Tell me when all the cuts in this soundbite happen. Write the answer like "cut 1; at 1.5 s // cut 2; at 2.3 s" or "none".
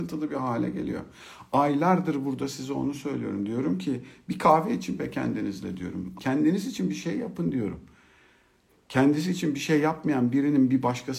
cut 1; at 6.1 s